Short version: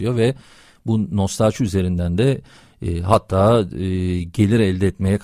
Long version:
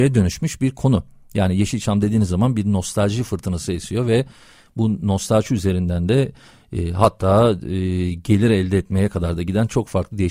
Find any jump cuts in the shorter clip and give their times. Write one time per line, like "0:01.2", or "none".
none